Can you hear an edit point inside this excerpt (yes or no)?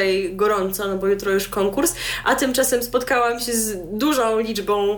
no